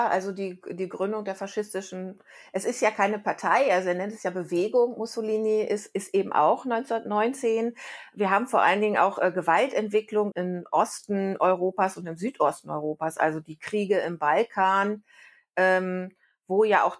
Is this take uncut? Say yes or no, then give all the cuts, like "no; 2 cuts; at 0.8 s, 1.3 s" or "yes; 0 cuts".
no; 1 cut; at 10.3 s